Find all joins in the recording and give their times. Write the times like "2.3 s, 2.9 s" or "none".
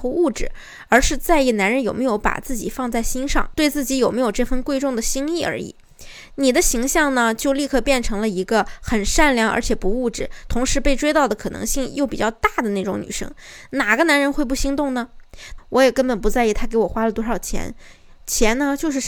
15.6 s